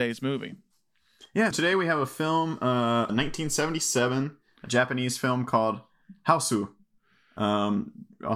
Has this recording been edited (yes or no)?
yes